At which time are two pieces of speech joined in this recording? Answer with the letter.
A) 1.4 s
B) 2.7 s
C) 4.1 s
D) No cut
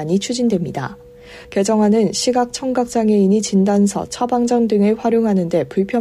A